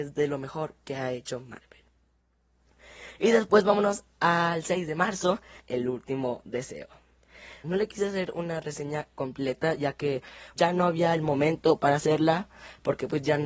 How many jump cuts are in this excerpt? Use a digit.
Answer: 3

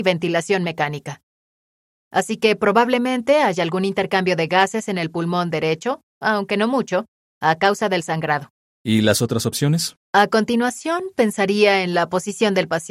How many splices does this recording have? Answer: 3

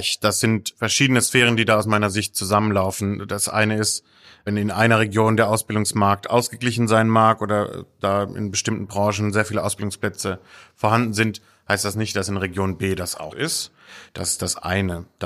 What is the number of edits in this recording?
1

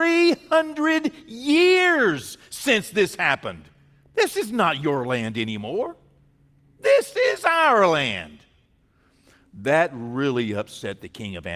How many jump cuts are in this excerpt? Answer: 0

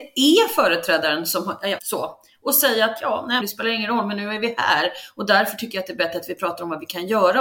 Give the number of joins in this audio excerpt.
2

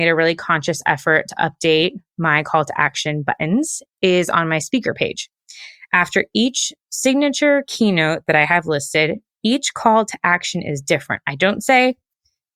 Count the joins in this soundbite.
0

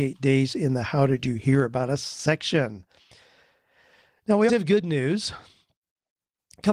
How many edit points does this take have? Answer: 1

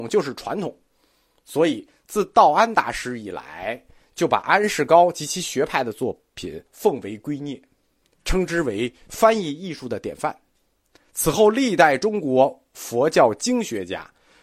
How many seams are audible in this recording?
1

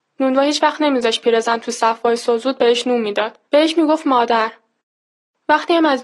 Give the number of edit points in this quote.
1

